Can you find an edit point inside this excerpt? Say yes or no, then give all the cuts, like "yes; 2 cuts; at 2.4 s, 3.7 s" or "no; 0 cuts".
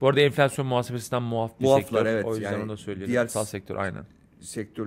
yes; 1 cut; at 3.3 s